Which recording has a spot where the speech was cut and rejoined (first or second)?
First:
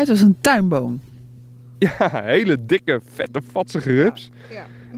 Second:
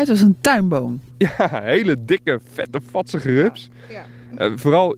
second